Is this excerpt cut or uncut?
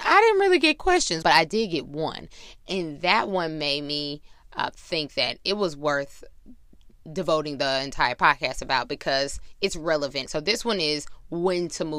cut